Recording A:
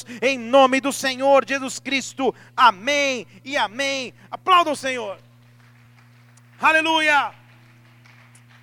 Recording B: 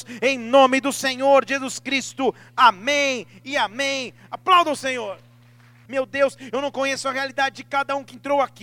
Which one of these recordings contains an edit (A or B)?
B